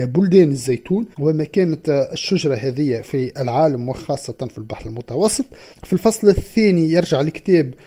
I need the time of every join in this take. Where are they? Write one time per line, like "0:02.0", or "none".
0:01.1
0:05.7